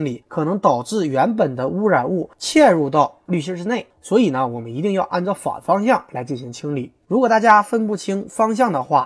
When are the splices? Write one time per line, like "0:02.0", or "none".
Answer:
none